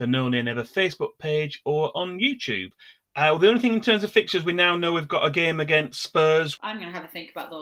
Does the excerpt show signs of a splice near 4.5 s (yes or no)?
no